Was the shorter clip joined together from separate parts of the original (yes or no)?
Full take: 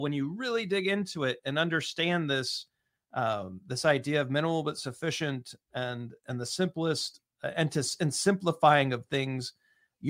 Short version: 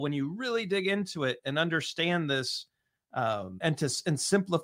yes